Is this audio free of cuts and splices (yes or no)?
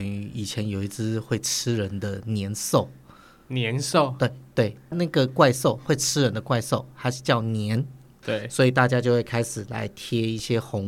no